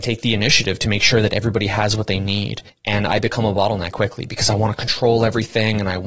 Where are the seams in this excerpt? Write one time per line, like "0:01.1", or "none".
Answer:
0:02.7
0:03.9